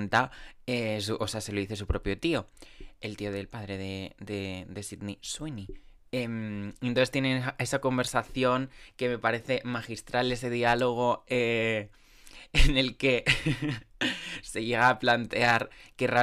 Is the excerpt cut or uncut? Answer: uncut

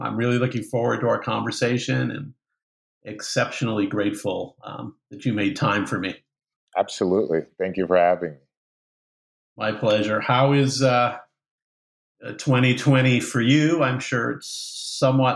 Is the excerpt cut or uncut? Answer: uncut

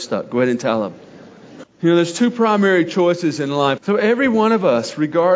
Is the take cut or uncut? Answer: cut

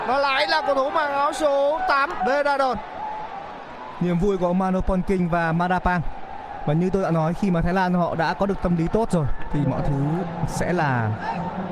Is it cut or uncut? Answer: cut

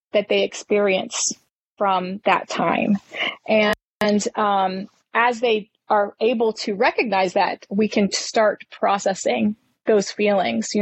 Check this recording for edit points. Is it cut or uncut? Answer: uncut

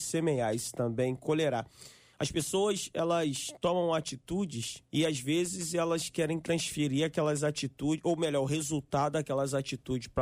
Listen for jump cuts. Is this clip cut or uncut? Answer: cut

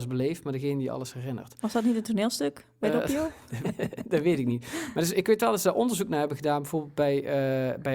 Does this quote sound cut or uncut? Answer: cut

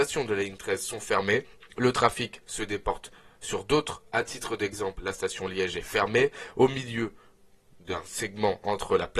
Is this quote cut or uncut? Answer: uncut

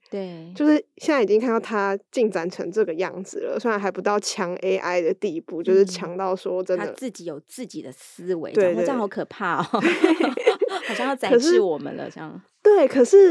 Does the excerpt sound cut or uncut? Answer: uncut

